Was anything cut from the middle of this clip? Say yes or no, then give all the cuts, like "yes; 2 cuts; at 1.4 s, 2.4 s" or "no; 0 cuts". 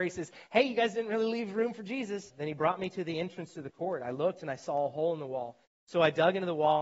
yes; 2 cuts; at 2.3 s, 5.6 s